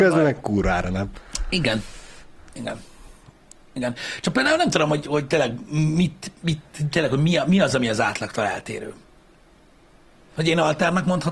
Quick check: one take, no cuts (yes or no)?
no